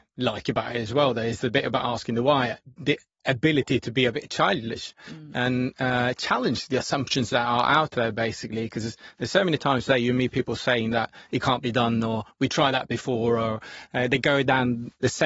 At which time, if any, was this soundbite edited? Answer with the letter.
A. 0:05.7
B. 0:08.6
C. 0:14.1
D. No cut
D